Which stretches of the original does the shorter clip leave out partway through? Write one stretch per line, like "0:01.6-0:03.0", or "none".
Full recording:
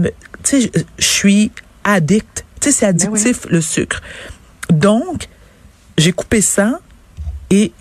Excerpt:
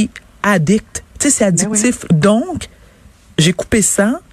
0:03.5-0:04.7